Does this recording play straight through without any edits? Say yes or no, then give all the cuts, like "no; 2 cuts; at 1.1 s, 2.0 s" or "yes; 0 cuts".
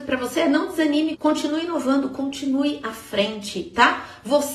no; 1 cut; at 1.1 s